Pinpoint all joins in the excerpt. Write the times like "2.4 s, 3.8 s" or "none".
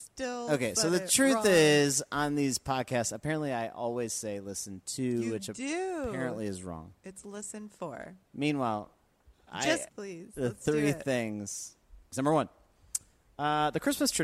9.9 s, 12.1 s